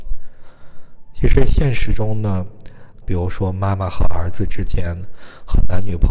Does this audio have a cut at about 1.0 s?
no; 1 cut; at 3.0 s

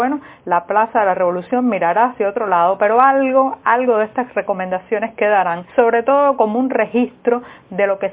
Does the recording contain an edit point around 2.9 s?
no; 1 cut; at 5.7 s

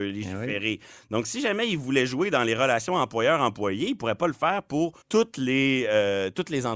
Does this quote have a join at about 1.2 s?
no; 1 cut; at 5.0 s

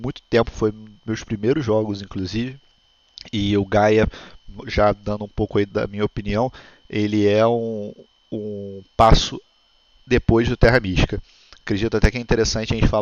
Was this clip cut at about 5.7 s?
yes; 1 cut; at 5.7 s

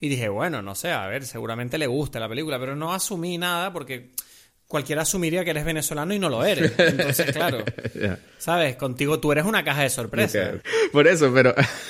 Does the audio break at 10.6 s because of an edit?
yes; 1 cut; at 10.6 s

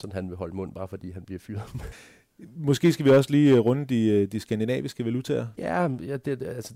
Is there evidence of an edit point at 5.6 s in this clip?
yes; 2 cuts; at 1.9 s, 5.6 s

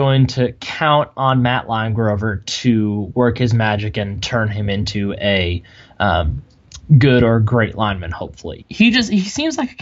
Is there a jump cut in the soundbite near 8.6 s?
yes; 1 cut; at 8.6 s

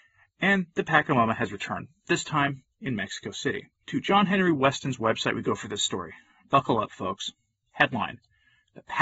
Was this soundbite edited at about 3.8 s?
yes; 1 cut; at 3.8 s

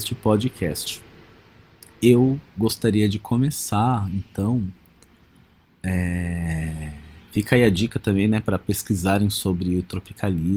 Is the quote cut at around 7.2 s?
no; 0 cuts

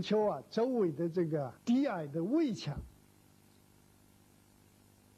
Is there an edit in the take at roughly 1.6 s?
yes; 1 cut; at 1.6 s

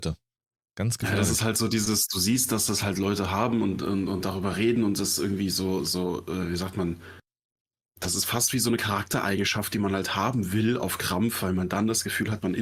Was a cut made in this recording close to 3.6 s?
no; 0 cuts

